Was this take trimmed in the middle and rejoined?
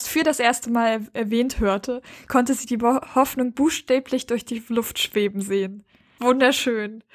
no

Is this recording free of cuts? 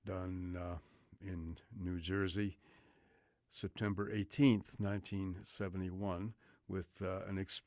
yes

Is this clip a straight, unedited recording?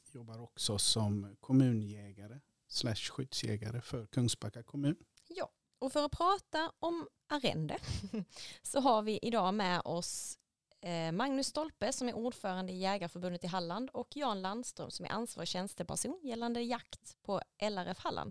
no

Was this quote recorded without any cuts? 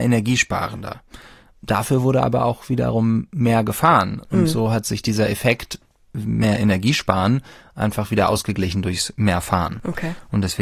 yes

